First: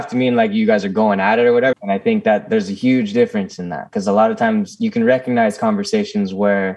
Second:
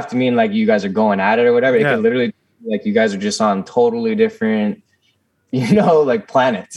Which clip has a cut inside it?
first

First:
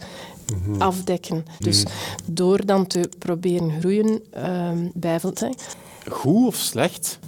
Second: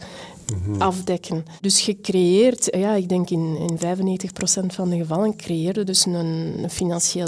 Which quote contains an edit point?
first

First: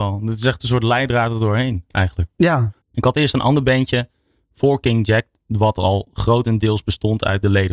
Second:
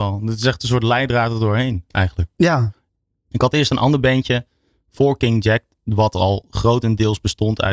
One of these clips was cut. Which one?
first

